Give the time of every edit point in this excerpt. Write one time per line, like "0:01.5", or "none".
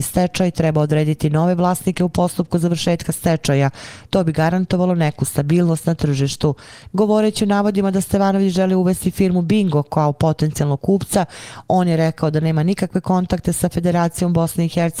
0:04.1
0:06.9